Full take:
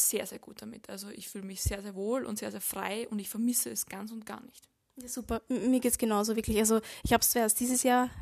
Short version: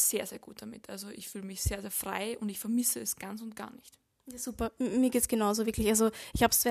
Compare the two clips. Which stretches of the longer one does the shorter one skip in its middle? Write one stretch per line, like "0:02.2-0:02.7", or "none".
0:01.8-0:02.5

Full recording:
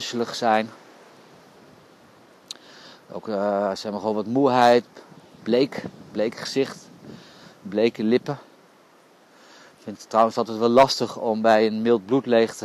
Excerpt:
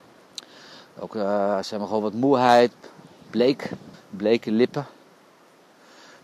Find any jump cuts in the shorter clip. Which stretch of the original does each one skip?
0:06.1-0:07.5

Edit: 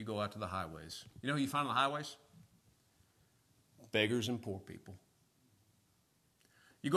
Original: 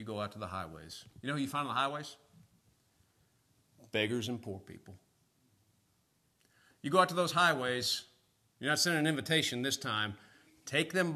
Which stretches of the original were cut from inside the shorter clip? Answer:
none

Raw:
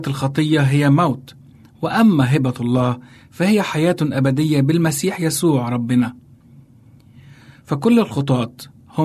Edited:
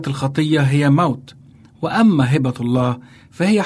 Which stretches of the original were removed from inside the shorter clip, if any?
none

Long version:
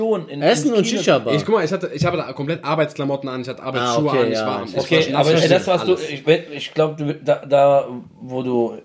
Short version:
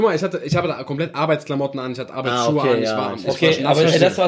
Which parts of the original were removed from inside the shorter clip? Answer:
none

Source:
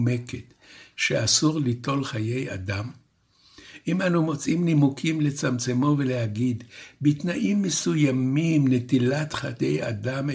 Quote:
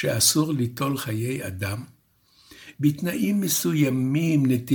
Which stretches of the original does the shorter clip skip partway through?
0:03.8-0:07.0

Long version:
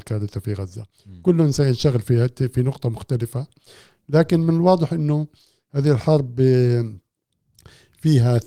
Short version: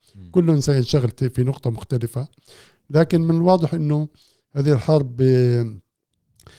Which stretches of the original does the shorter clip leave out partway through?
0:02.0-0:02.3

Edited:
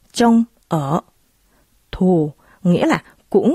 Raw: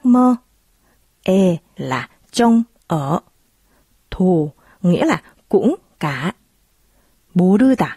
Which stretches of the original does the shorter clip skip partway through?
none

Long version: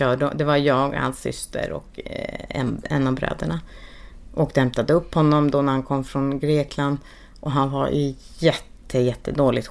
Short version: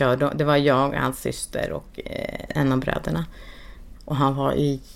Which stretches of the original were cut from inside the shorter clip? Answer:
0:02.5-0:02.8
0:04.3-0:07.3

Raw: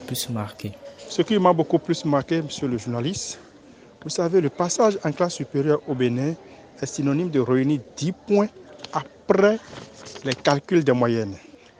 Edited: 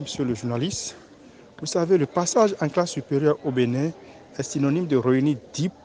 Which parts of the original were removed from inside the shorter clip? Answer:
none

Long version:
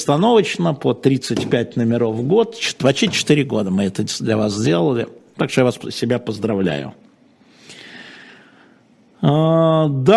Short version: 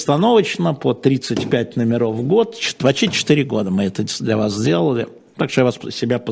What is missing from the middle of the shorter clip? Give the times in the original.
none

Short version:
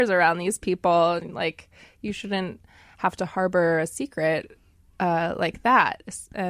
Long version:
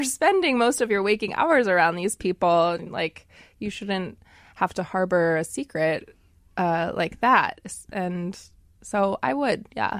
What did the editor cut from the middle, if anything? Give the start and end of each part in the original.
none

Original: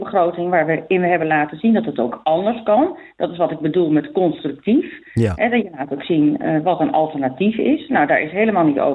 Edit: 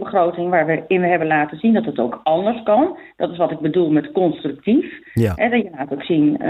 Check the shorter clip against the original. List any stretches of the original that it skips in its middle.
none

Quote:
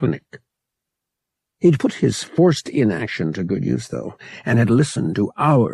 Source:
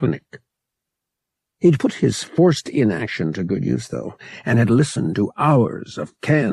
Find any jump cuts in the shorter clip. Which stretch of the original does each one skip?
none

